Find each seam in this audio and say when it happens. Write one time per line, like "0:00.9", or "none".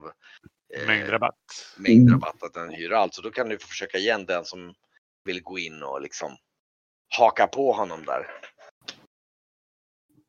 none